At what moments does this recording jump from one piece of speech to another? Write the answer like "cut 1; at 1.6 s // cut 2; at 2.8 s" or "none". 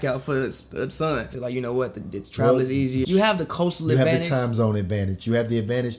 cut 1; at 1.3 s // cut 2; at 3.0 s